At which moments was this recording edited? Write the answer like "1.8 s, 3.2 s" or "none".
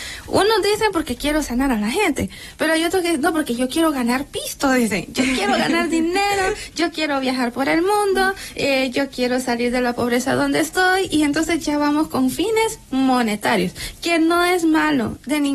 none